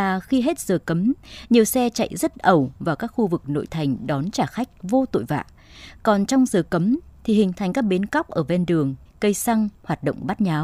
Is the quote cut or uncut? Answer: cut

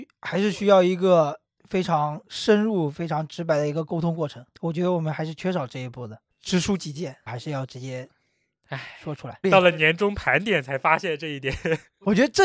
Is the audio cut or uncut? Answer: cut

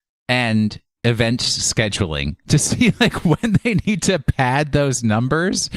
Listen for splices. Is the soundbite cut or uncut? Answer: uncut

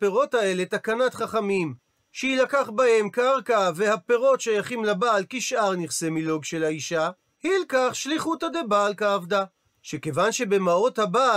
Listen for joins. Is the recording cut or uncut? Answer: cut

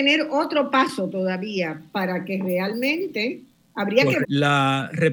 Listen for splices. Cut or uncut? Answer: cut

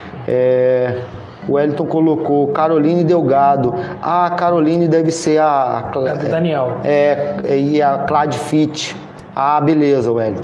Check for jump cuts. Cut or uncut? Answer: uncut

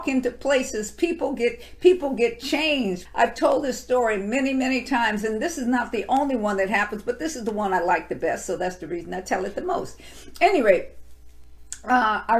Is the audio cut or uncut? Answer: cut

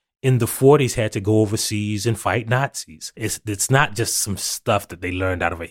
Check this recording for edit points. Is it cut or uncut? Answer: cut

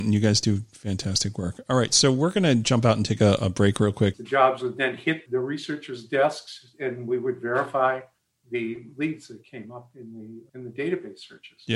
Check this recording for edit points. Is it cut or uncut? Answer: cut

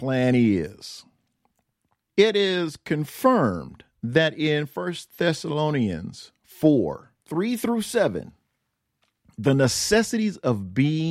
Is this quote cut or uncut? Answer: cut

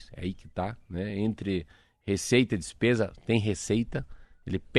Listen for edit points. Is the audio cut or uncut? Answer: uncut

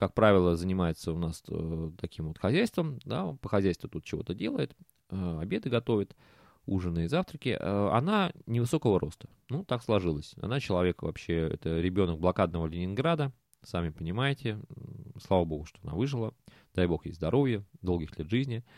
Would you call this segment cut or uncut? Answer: uncut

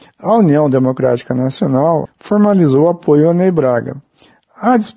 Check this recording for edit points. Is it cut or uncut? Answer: cut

